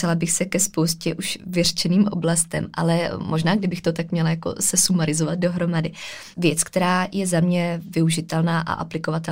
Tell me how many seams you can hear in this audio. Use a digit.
1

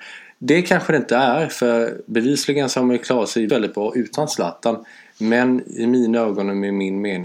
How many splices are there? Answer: 1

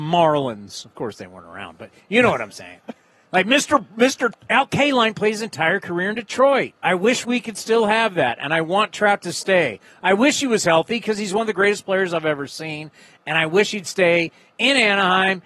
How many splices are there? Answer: 2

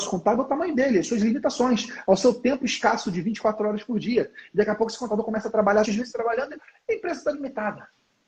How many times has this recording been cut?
1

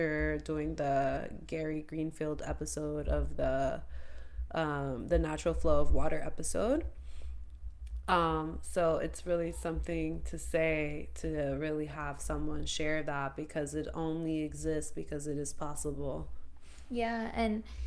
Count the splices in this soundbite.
0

